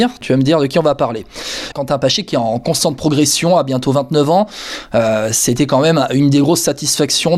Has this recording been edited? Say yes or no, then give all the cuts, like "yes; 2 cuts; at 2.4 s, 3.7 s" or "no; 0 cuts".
yes; 1 cut; at 1.7 s